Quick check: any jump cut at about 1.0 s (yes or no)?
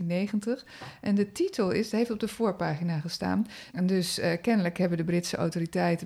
no